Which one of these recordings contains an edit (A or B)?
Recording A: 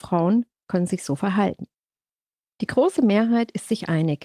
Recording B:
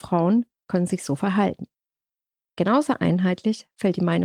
B